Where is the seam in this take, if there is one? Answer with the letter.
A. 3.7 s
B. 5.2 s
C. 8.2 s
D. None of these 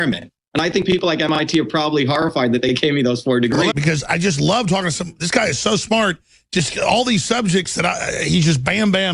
A